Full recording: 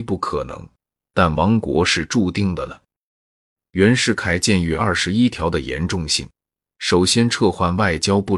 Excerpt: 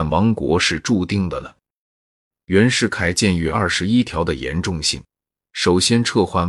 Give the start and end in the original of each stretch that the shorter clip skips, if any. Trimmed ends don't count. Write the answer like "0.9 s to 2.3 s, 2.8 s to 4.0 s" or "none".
none